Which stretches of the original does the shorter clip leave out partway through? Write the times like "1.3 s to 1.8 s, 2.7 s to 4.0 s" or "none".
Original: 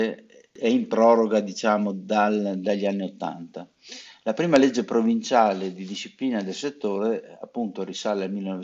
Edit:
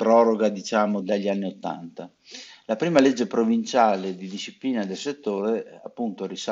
1.9 s to 2.6 s